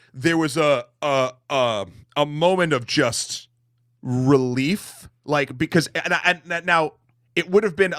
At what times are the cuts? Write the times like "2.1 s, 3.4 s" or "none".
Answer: none